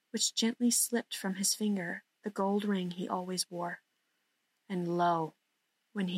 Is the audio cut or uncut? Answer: uncut